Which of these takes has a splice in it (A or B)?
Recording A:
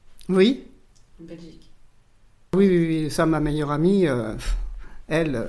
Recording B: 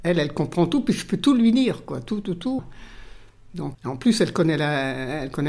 B